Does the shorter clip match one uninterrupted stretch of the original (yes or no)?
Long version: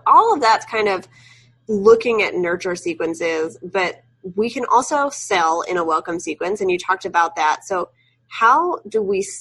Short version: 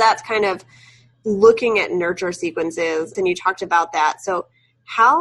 no